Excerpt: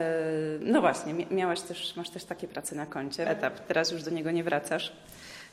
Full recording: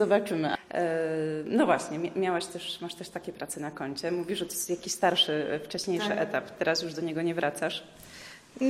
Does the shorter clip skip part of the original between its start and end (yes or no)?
yes